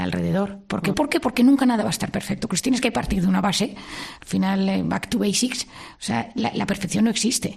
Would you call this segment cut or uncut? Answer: cut